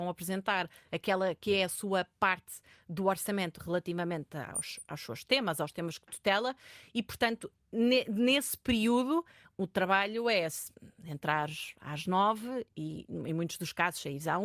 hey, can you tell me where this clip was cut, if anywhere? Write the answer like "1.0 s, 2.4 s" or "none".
none

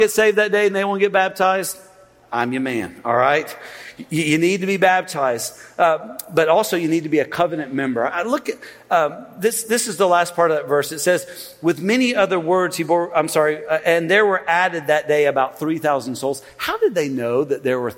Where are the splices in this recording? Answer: none

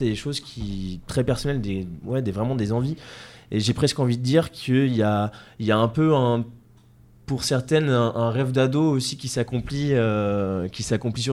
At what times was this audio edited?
none

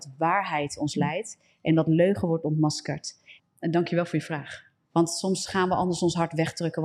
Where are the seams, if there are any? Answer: 3.4 s, 4.9 s

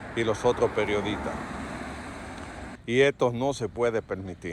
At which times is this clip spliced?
2.8 s

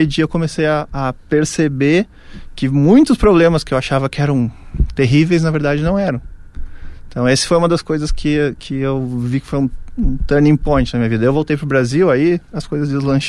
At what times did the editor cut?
none

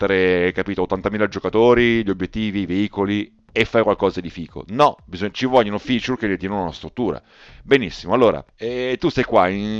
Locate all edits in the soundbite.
8.5 s

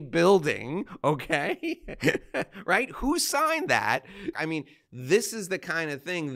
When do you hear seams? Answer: 4.3 s

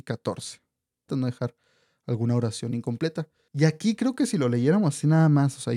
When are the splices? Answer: 1.1 s, 3.5 s

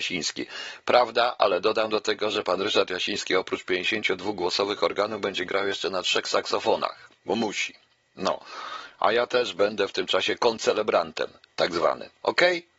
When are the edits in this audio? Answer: 7.2 s

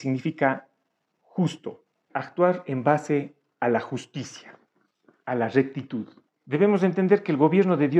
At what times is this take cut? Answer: 2.1 s, 6.3 s

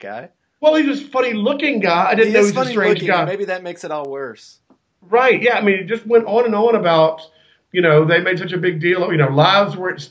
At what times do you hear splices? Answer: none

